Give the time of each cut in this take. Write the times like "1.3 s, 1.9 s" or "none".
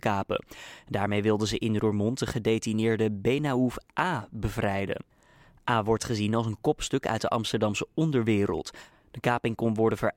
none

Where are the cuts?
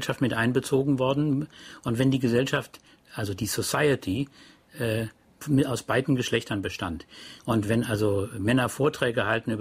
7.4 s

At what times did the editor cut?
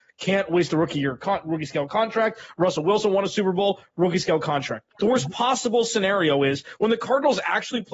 4.9 s

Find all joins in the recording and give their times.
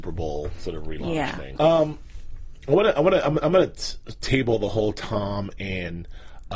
1.6 s

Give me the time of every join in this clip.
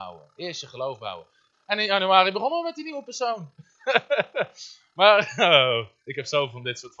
1.5 s

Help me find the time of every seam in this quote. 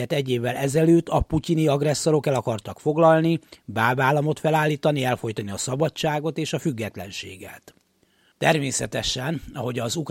8.3 s

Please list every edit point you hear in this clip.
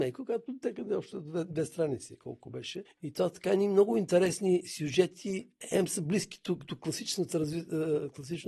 2.9 s

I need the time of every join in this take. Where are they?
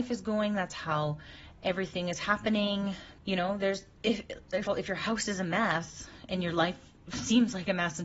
3.2 s, 4.7 s

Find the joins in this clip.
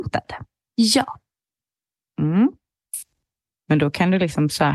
3.5 s

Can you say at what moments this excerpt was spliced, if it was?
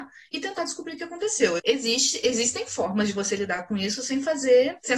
1.6 s

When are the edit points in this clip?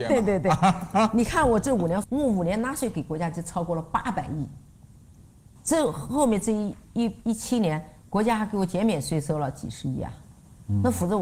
none

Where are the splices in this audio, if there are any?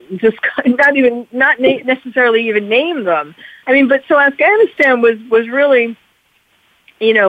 3.6 s

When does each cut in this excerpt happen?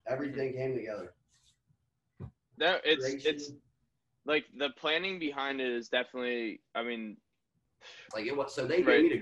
2.6 s, 8.1 s

